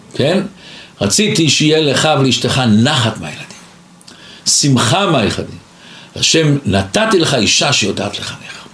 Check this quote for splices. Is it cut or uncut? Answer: uncut